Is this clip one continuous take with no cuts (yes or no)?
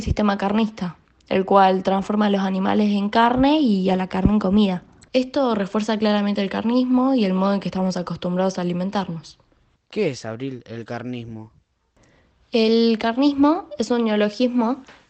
no